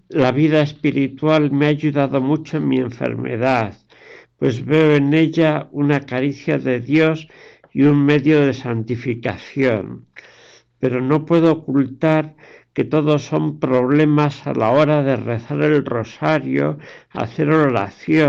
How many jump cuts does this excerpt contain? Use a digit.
0